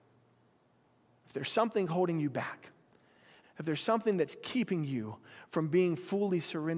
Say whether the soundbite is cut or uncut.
cut